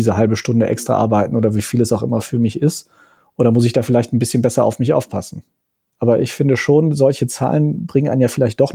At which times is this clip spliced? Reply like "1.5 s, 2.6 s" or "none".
5.9 s